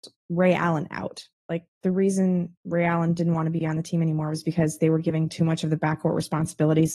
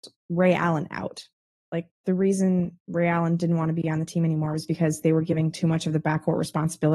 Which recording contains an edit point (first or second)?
first